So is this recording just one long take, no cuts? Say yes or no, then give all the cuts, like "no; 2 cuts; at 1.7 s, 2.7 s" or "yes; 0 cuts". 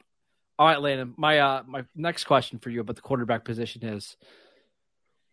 yes; 0 cuts